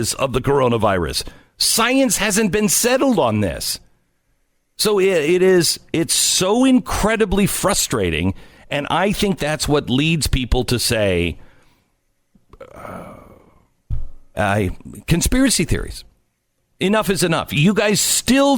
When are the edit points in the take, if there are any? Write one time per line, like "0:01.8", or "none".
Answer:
0:14.3
0:16.6